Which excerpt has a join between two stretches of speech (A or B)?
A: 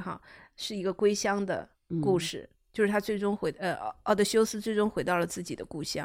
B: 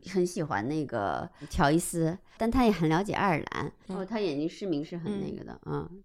B